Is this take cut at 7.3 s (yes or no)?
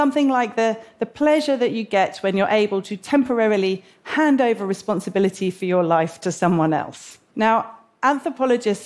yes